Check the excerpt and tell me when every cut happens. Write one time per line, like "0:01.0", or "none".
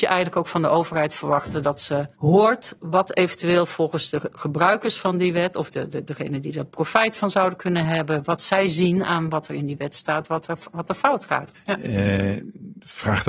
0:11.6